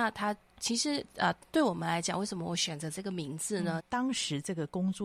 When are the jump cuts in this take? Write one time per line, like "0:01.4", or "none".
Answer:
0:03.8